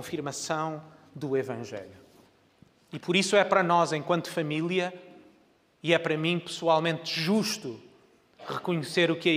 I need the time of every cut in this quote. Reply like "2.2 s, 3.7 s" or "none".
none